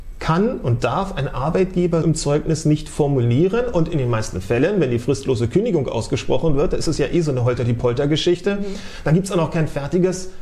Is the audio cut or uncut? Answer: cut